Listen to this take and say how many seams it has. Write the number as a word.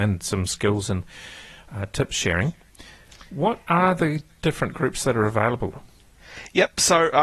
zero